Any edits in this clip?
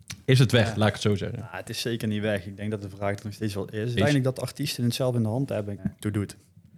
yes; 2 cuts; at 4.0 s, 5.8 s

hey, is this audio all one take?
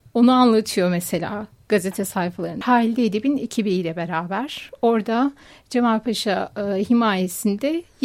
no; 1 cut; at 2.6 s

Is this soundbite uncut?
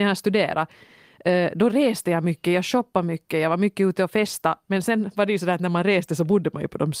yes; 0 cuts

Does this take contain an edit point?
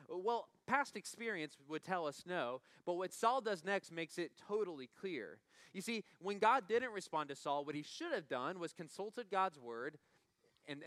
no; 0 cuts

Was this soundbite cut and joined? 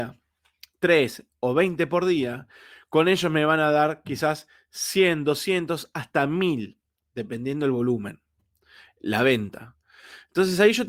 no; 0 cuts

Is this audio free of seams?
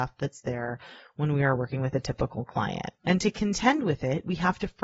no; 1 cut; at 3.0 s

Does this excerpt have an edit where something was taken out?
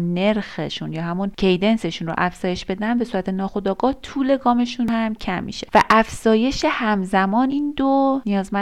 yes; 1 cut; at 7.5 s

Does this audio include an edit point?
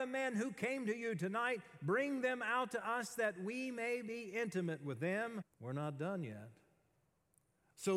yes; 1 cut; at 5.4 s

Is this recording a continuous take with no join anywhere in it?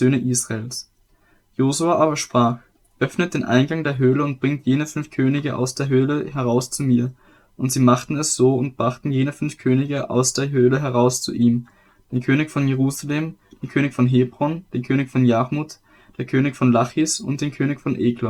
yes; 0 cuts

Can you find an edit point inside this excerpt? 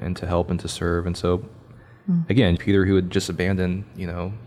yes; 1 cut; at 2.6 s

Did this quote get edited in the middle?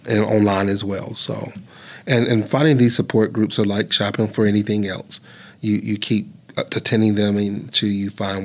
no; 0 cuts

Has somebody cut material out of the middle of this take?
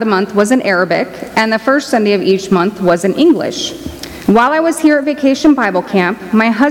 yes; 1 cut; at 4.2 s

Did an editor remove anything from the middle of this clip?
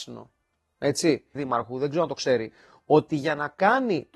yes; 1 cut; at 1.4 s

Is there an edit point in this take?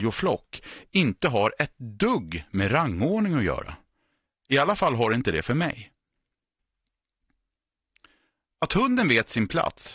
no; 0 cuts

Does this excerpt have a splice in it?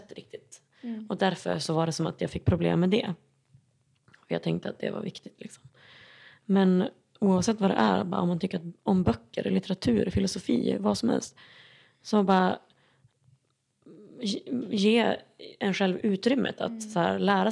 no; 0 cuts

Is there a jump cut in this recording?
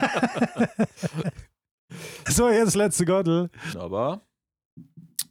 yes; 2 cuts; at 2.3 s, 3.7 s

